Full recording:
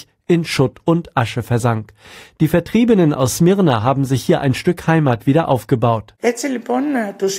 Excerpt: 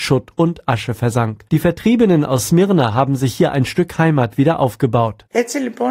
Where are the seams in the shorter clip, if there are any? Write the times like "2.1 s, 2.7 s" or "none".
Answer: 1.5 s